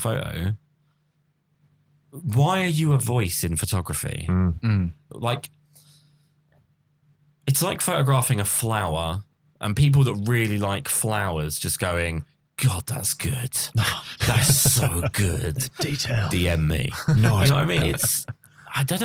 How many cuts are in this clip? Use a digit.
2